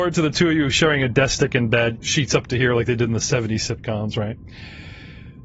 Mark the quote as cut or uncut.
cut